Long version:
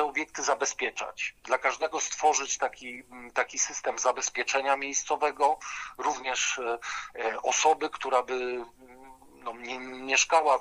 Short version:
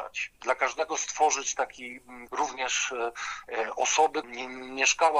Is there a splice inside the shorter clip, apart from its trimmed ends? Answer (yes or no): yes